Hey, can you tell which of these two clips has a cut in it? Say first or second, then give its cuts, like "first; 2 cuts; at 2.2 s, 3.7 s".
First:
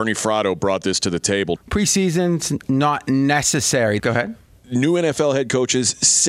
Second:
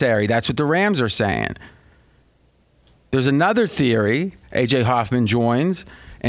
first; 2 cuts; at 1.6 s, 4.0 s